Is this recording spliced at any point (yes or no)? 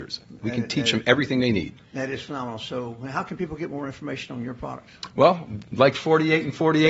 no